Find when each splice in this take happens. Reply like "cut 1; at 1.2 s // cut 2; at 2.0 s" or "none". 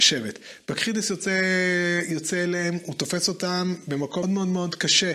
cut 1; at 4.2 s